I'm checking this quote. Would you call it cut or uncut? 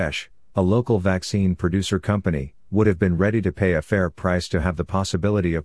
cut